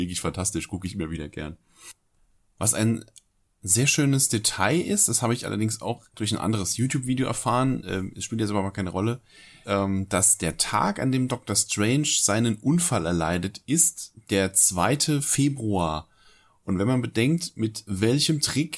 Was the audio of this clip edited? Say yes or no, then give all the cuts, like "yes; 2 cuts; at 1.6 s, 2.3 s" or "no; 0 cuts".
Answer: yes; 2 cuts; at 9.6 s, 16.6 s